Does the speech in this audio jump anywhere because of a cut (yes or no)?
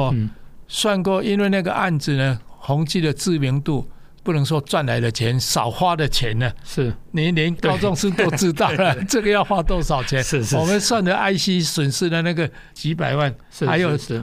no